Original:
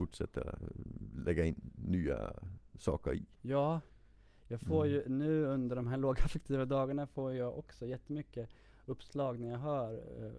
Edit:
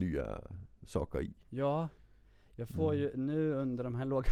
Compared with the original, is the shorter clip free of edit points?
yes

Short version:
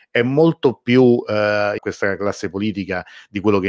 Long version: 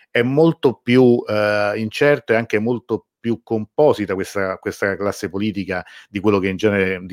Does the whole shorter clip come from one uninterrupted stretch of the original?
no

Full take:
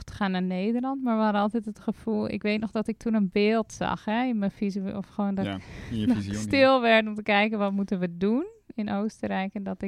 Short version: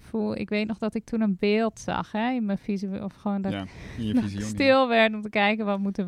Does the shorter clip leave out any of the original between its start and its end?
no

